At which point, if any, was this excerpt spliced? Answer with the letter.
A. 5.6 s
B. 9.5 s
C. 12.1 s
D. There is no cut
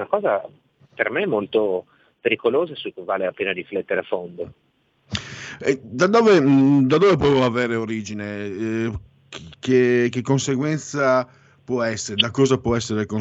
D